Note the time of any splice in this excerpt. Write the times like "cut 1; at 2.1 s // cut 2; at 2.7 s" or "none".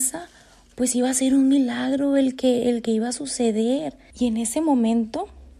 cut 1; at 4.1 s